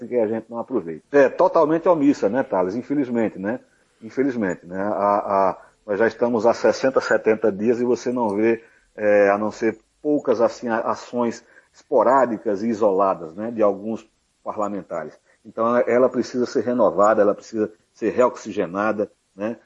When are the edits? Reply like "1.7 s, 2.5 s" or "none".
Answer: 1.0 s